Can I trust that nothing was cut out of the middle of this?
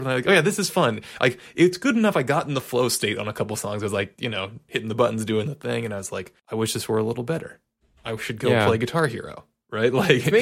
no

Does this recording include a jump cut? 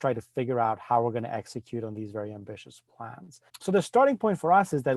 yes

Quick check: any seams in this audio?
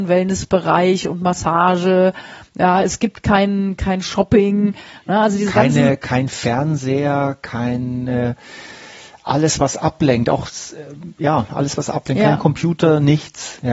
no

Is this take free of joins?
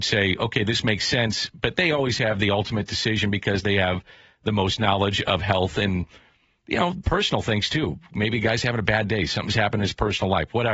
yes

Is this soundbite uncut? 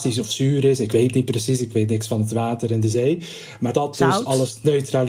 no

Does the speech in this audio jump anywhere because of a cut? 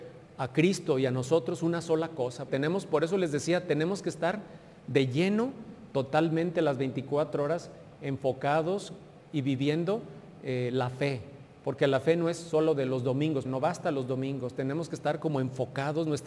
yes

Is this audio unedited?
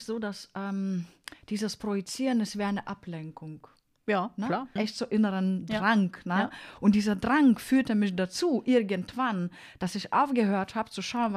no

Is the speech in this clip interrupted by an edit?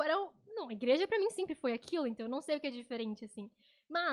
no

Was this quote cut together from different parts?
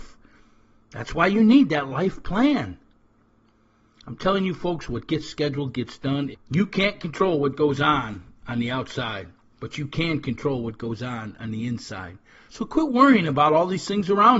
yes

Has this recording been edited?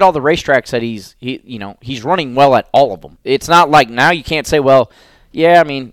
no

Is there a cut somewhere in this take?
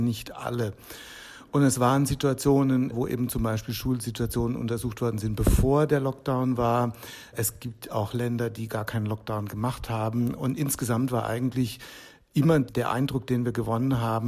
no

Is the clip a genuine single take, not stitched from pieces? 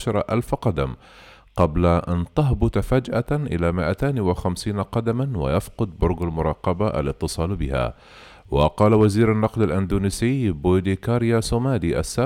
yes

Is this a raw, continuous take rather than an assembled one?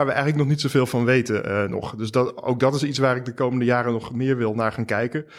yes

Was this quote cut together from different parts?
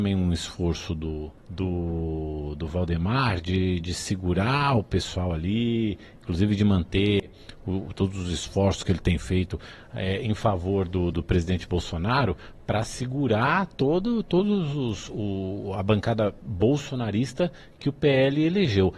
yes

